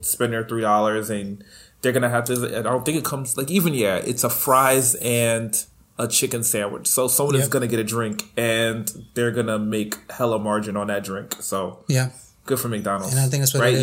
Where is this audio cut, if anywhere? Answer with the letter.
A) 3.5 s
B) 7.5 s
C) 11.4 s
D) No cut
D